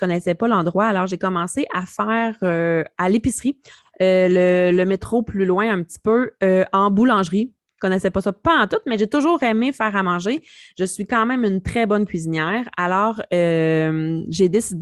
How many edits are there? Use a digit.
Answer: 0